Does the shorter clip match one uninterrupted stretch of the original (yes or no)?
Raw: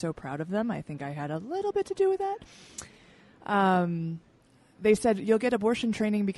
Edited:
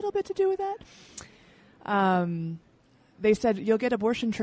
yes